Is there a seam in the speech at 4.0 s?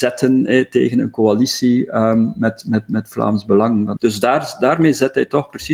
yes; 1 cut; at 4.0 s

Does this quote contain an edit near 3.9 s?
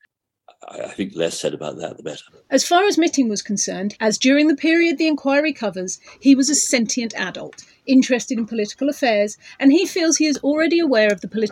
yes; 1 cut; at 3.9 s

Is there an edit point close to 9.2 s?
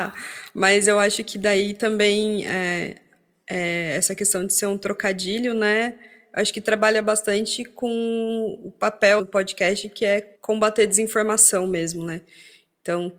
yes; 2 cuts; at 9.2 s, 10.3 s

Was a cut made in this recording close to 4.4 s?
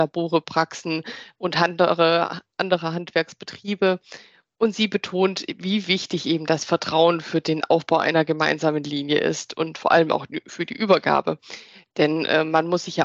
no; 0 cuts

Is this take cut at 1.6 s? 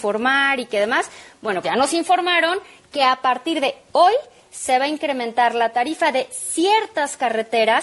yes; 1 cut; at 1.6 s

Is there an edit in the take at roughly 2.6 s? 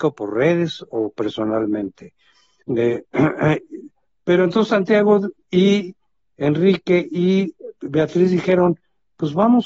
yes; 1 cut; at 2.6 s

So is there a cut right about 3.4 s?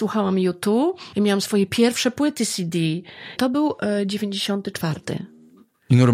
yes; 2 cuts; at 1.1 s, 3.4 s

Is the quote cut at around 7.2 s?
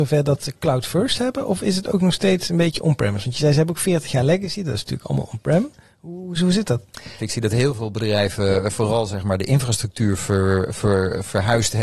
yes; 1 cut; at 7.2 s

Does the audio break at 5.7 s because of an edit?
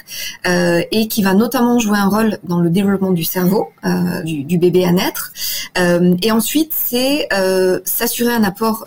no; 1 cut; at 4.2 s

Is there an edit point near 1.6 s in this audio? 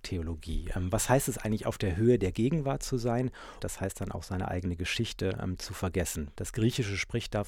no; 2 cuts; at 3.6 s, 6.4 s

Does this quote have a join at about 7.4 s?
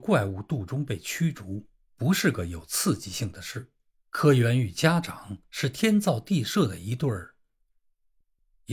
no; 1 cut; at 3.9 s

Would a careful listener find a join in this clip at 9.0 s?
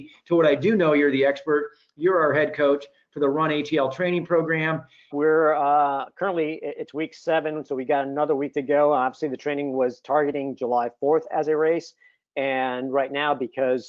no; 1 cut; at 5.1 s

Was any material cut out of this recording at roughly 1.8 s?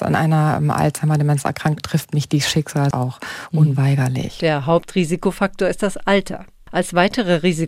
yes; 1 cut; at 1.8 s

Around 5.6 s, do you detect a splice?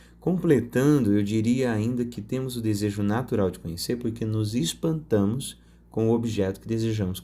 no; 0 cuts

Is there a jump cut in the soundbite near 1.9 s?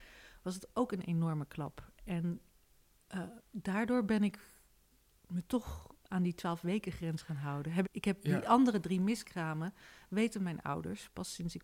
no; 1 cut; at 7.8 s

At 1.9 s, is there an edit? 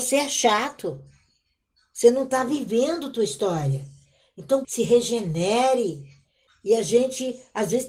no; 2 cuts; at 4.6 s, 6.5 s

